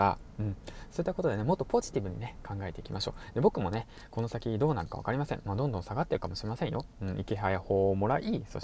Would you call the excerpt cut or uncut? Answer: uncut